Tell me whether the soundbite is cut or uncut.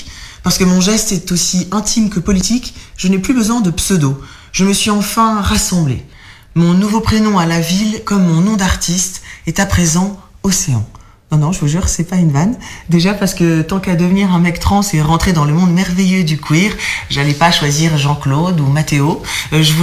uncut